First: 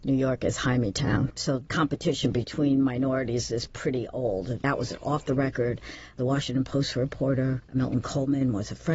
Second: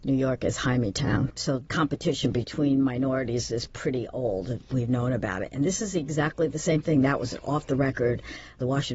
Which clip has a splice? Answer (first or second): first